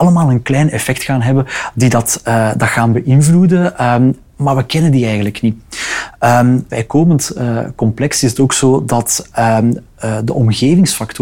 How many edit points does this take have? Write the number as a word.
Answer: one